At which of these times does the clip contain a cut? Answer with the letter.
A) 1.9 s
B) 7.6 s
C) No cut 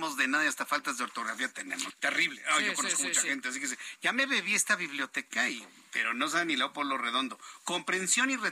A